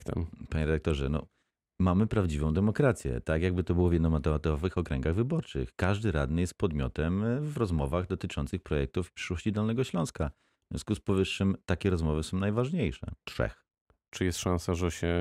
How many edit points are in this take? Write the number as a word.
one